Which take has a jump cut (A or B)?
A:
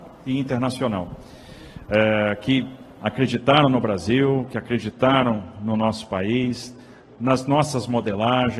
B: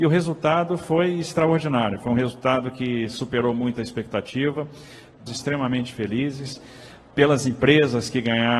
B